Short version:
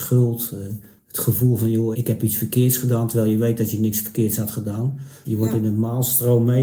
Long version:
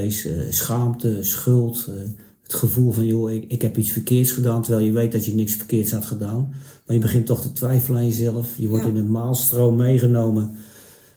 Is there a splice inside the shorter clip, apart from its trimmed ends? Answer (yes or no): yes